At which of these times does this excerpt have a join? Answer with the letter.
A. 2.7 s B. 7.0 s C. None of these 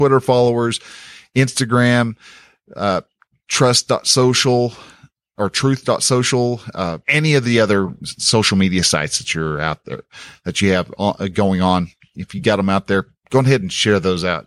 B